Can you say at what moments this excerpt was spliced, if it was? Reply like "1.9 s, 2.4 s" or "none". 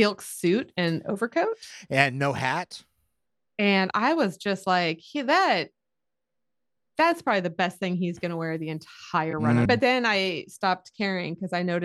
9.7 s

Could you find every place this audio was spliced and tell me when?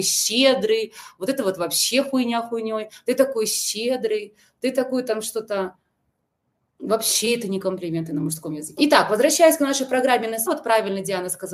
8.8 s, 10.5 s

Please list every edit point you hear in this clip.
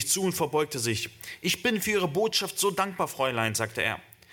none

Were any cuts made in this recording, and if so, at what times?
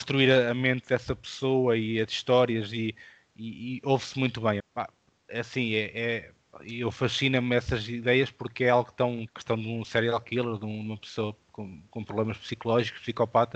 4.6 s, 9.3 s

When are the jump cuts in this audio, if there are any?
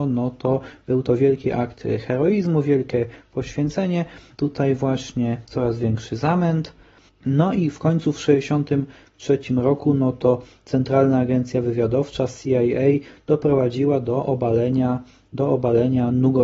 4.3 s, 7.1 s

